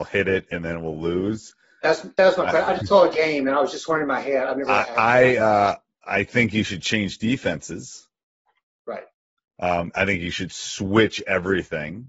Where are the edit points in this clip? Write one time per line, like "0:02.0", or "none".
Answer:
none